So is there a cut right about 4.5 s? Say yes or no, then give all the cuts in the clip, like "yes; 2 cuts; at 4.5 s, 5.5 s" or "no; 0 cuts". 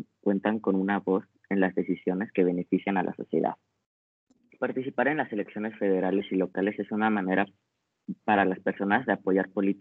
yes; 1 cut; at 4.5 s